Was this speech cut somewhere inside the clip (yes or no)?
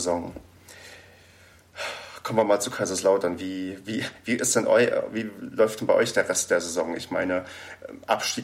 no